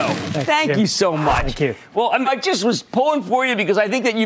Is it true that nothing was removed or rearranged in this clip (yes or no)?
no